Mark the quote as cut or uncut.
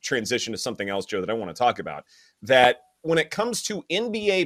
uncut